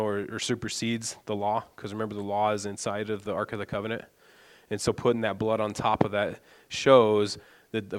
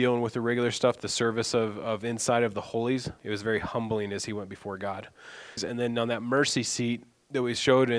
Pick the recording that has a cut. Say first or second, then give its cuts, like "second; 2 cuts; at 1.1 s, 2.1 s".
second; 2 cuts; at 3.2 s, 5.6 s